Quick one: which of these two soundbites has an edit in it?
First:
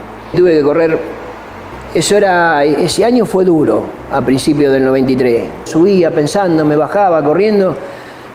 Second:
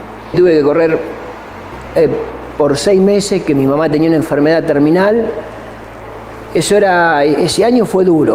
first; 2 cuts; at 1.9 s, 5.7 s

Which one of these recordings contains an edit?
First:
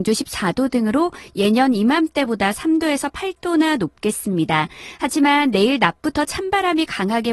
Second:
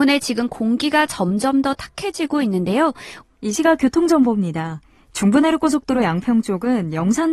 second; 1 cut; at 3.2 s

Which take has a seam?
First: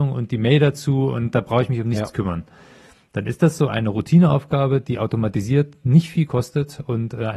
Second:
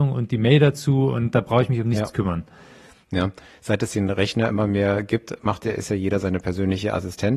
second; 1 cut; at 3.0 s

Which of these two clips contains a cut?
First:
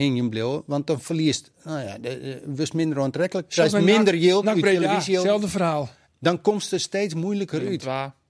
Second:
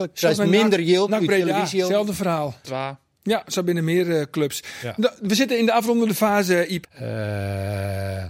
second; 2 cuts; at 2.6 s, 6.8 s

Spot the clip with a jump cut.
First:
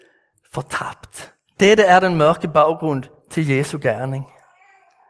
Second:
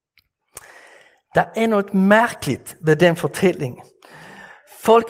first; 1 cut; at 1.5 s

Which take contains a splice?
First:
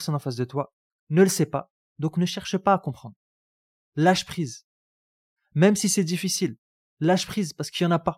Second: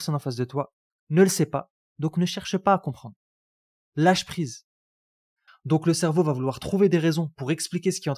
second; 1 cut; at 5.5 s

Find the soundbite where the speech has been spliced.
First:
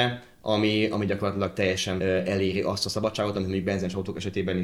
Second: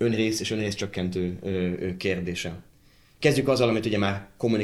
first; 1 cut; at 2.0 s

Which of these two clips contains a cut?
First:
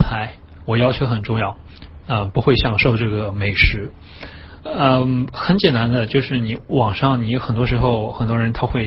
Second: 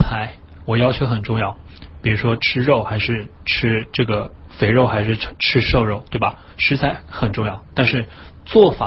first; 2 cuts; at 2.0 s, 4.6 s

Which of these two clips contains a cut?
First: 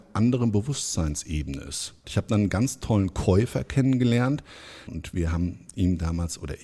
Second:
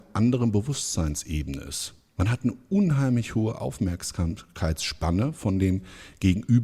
first; 1 cut; at 2.0 s

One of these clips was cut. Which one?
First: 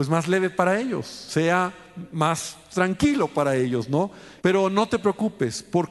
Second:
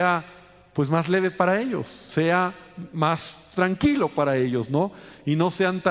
first; 1 cut; at 4.4 s

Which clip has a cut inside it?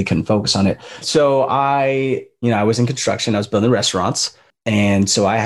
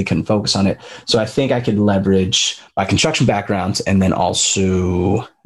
first; 1 cut; at 1.0 s

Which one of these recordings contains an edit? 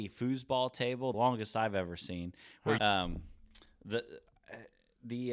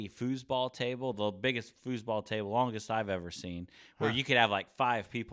first; 2 cuts; at 1.1 s, 2.8 s

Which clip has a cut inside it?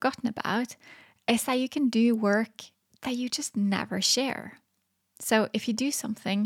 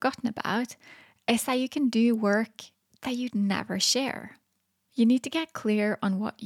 second; 2 cuts; at 3.3 s, 4.8 s

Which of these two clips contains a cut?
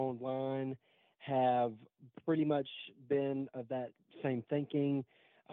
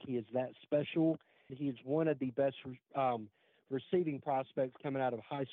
second; 1 cut; at 1.5 s

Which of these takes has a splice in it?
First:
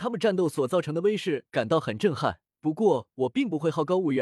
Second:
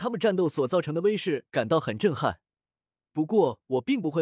first; 1 cut; at 2.5 s

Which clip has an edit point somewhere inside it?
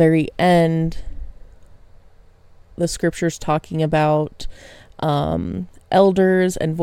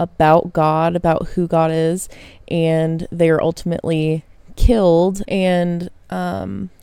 second; 1 cut; at 5.2 s

